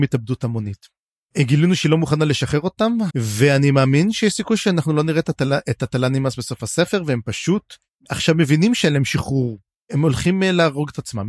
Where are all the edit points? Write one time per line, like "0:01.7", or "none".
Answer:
0:03.1